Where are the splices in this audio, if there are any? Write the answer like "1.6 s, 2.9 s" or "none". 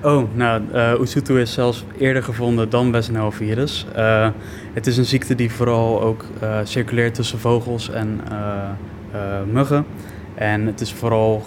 none